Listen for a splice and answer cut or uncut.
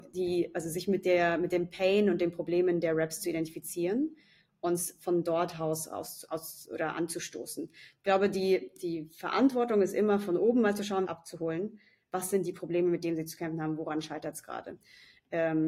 cut